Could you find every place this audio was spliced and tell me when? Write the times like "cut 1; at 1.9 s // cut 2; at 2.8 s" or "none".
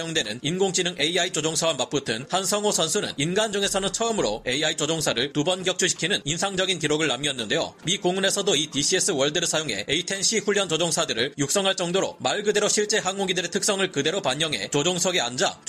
cut 1; at 7.8 s